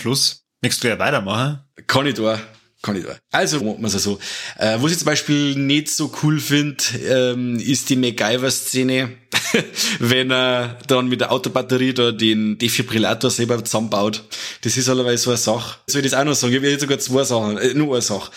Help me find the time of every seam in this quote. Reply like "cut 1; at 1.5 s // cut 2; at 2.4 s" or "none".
cut 1; at 3.6 s // cut 2; at 15.9 s